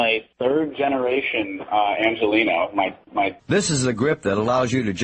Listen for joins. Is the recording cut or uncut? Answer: cut